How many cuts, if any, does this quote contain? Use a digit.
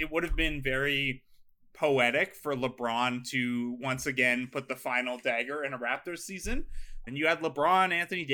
1